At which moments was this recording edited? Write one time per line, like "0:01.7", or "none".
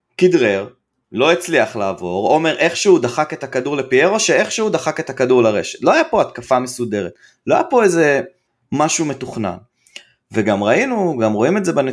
none

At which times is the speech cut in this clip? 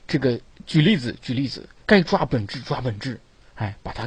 0:01.8

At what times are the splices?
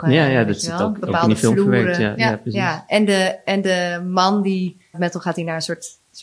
0:04.9

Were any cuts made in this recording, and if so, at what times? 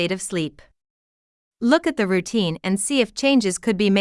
none

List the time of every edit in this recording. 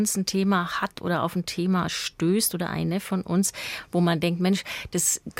none

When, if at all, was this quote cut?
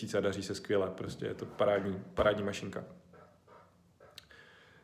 none

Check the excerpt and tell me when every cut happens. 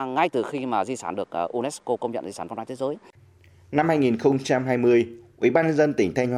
none

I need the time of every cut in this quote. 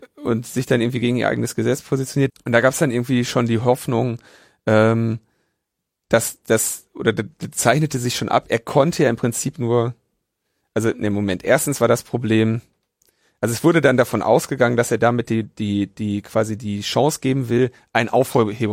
0:02.3

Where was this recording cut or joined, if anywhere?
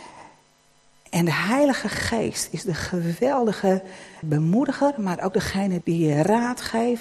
0:04.2
0:05.8

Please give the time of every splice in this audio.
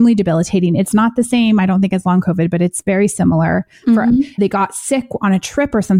0:04.4

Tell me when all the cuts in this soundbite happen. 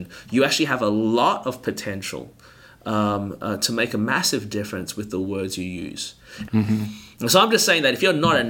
0:06.5

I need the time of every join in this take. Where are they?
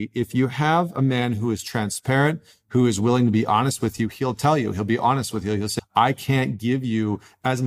0:05.8

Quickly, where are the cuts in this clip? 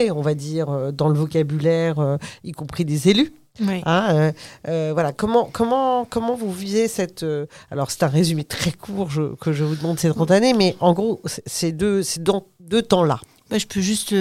none

